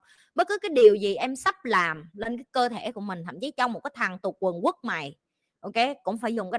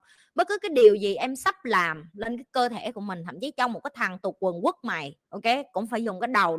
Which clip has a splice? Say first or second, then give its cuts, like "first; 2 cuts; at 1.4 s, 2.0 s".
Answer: second; 1 cut; at 5.2 s